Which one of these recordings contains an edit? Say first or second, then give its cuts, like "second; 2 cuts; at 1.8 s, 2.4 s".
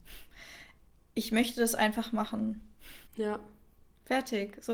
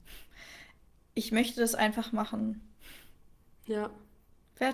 first; 1 cut; at 3.1 s